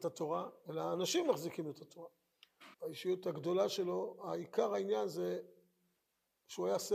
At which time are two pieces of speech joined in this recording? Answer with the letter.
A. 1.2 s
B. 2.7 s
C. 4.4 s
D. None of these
B